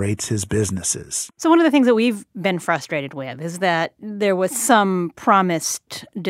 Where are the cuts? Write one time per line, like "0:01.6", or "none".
0:01.3